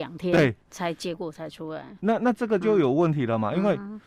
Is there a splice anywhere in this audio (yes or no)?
no